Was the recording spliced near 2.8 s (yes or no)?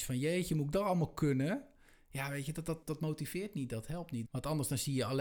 yes